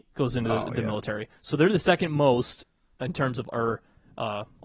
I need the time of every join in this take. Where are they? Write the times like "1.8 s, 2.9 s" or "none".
3.5 s